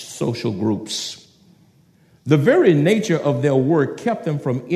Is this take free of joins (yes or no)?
yes